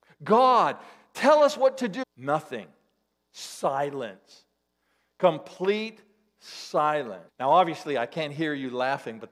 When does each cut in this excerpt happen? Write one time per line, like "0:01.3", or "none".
0:02.0
0:07.3

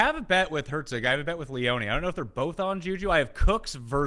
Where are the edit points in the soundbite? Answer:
none

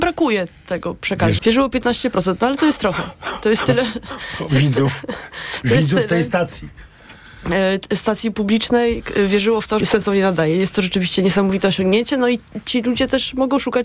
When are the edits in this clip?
0:01.4
0:09.8

